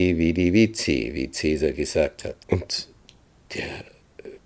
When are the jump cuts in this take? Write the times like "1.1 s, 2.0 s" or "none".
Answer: 2.4 s

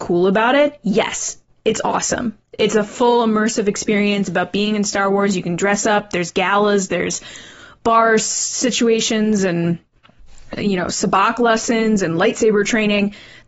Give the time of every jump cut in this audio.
none

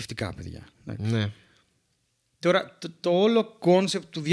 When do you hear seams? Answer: none

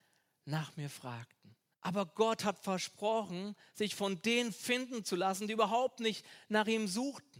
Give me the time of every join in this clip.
1.7 s

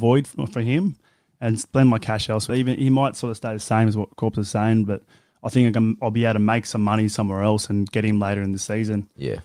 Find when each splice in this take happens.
2.5 s

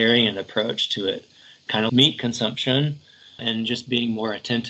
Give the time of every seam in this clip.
1.9 s, 3.4 s

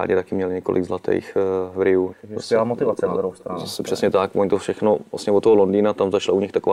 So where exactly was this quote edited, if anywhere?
2.1 s

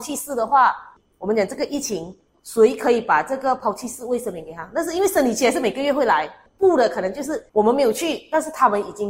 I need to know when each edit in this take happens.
2.4 s, 7.5 s

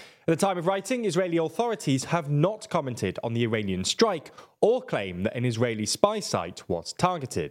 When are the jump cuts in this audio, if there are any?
none

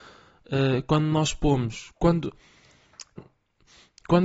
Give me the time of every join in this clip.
3.2 s

